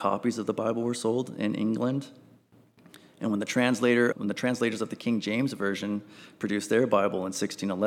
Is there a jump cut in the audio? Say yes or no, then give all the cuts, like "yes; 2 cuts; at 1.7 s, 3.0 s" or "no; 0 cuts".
yes; 1 cut; at 4.1 s